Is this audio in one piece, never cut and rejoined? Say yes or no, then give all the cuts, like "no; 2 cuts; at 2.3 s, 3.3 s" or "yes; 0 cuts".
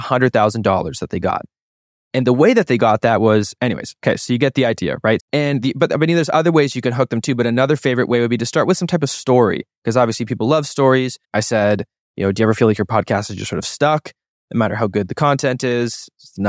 no; 2 cuts; at 5.2 s, 11.2 s